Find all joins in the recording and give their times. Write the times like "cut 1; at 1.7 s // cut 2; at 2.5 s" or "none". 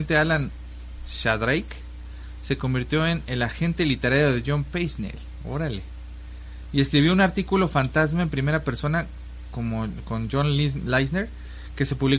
none